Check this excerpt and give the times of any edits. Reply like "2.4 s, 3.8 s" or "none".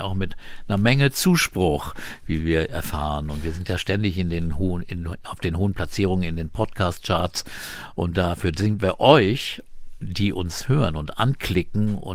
none